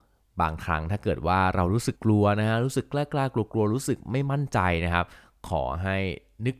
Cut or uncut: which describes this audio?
cut